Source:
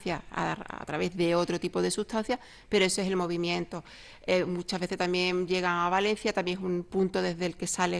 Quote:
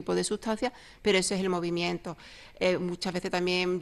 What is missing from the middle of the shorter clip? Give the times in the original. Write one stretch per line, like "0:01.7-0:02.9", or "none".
none